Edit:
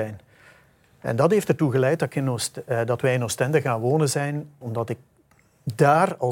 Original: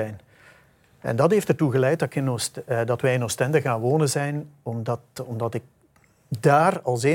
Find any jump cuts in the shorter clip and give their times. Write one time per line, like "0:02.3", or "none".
0:04.6